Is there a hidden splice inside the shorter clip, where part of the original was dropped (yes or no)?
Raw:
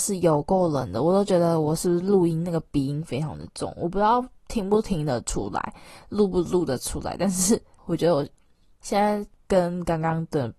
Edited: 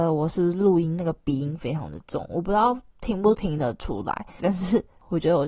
yes